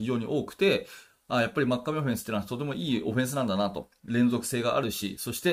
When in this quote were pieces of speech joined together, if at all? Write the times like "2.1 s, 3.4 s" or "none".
none